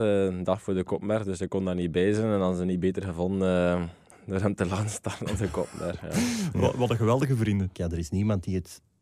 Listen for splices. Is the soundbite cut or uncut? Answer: cut